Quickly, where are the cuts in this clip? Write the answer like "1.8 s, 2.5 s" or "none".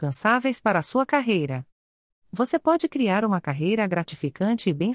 2.1 s